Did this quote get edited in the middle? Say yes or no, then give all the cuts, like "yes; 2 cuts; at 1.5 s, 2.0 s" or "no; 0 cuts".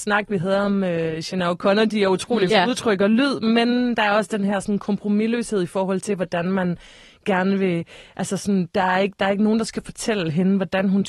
yes; 1 cut; at 2.5 s